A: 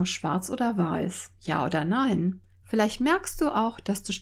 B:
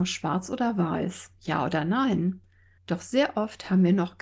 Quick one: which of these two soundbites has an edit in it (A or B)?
A